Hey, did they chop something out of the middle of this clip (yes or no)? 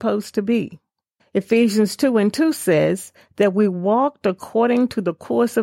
yes